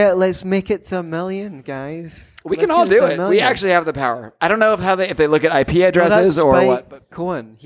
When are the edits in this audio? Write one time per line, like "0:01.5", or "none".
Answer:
none

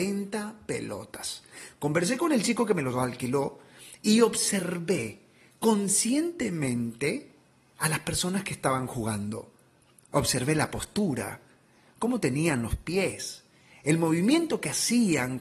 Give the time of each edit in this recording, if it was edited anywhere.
none

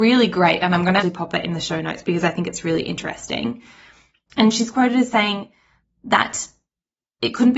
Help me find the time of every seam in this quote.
0:01.0

